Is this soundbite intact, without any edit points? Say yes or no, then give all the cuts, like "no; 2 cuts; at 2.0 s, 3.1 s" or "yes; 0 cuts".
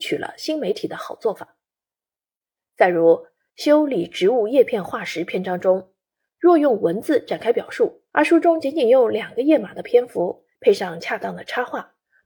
no; 2 cuts; at 8.1 s, 10.5 s